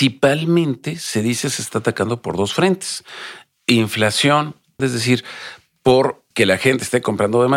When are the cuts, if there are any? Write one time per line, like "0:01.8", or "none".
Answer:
0:04.8
0:06.3